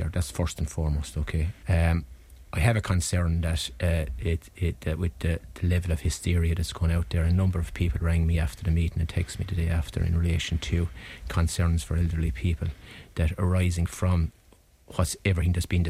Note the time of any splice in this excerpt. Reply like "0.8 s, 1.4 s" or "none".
1.6 s

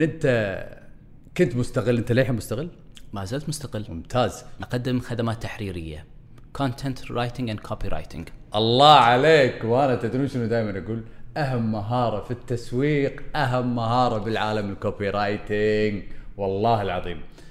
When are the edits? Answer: 4.6 s

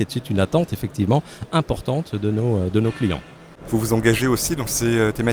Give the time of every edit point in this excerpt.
3.6 s

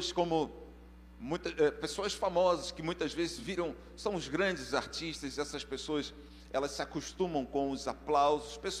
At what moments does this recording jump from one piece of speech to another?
none

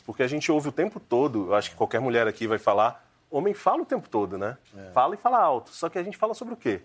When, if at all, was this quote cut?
none

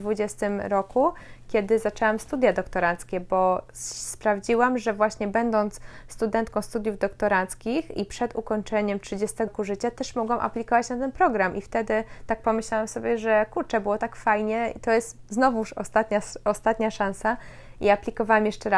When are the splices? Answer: 9.5 s

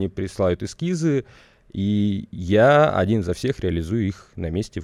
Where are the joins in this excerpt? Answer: none

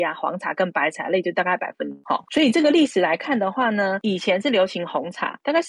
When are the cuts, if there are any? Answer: none

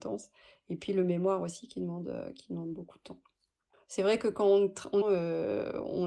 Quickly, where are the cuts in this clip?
3.7 s, 5.0 s

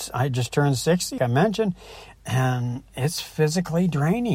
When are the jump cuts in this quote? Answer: 1.2 s

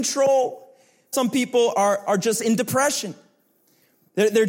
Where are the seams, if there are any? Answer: 1.1 s

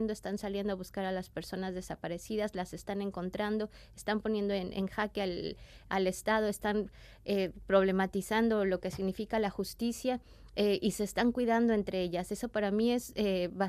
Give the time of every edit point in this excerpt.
none

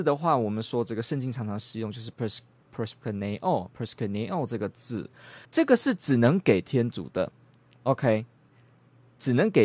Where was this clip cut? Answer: 5.4 s

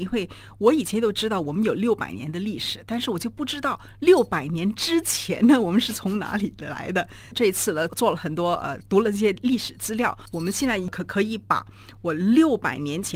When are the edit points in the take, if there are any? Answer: 7.9 s

